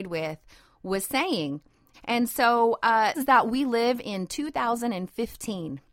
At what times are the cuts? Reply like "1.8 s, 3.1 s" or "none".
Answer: 1.9 s, 3.1 s

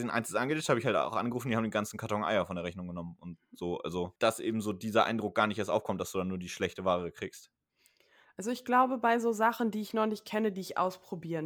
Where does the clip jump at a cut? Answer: 4.2 s

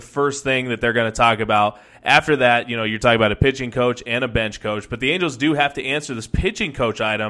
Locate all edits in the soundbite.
none

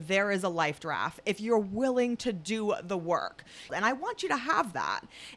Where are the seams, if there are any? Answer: 3.7 s

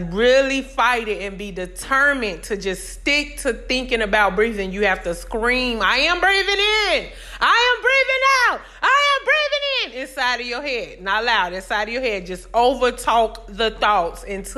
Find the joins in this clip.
none

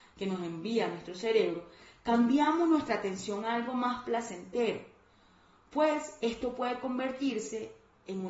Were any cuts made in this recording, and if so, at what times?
none

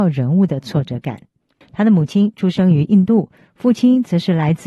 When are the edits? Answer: 1.6 s

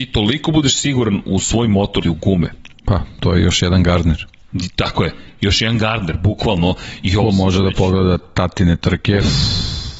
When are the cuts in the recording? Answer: 2.0 s

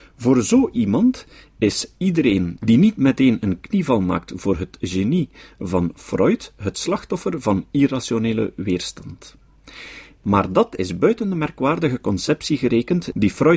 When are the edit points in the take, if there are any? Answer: 10.2 s

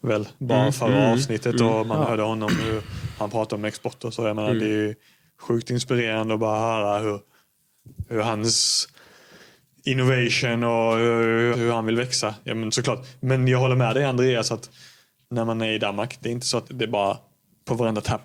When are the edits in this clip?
11.5 s, 16.6 s

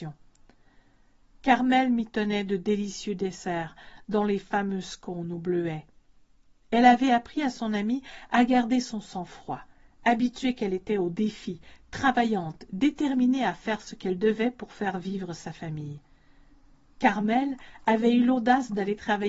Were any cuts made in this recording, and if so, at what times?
none

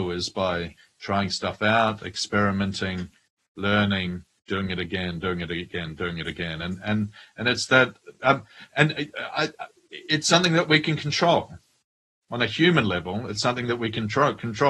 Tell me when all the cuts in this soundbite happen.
none

